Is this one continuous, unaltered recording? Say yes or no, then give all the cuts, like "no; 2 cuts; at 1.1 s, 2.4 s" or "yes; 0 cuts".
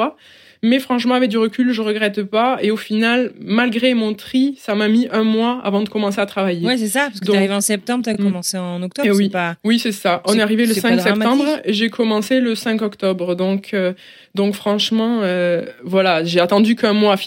yes; 0 cuts